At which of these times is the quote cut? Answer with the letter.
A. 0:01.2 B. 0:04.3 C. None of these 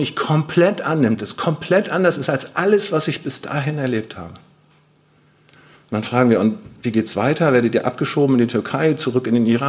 C